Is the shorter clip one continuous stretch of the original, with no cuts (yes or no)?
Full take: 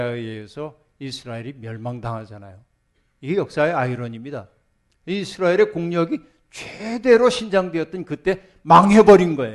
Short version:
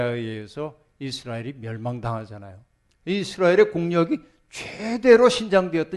no